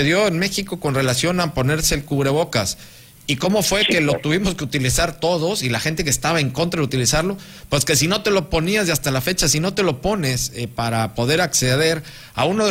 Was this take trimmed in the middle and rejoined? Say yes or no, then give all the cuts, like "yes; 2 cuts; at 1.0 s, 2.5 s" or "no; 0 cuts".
no; 0 cuts